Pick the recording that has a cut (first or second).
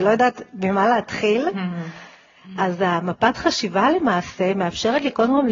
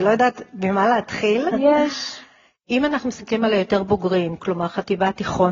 second